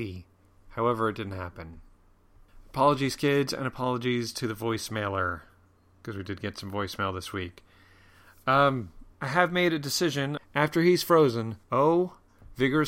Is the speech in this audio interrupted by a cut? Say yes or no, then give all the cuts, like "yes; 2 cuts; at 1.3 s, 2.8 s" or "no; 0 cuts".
yes; 3 cuts; at 9.1 s, 10.4 s, 11.6 s